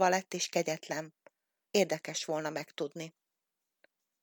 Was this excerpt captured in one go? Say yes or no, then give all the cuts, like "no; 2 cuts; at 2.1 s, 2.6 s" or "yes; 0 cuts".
no; 1 cut; at 1.7 s